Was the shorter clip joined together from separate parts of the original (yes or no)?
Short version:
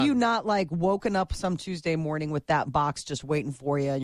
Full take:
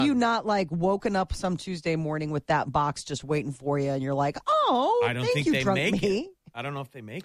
no